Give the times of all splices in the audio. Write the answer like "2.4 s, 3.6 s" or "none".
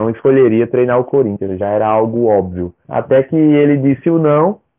2.8 s